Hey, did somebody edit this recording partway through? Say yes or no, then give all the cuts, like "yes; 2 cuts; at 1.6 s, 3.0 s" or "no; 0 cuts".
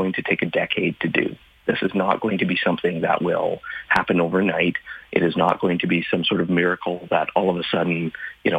no; 0 cuts